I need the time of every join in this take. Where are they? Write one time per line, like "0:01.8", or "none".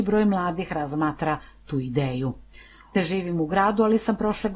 0:02.9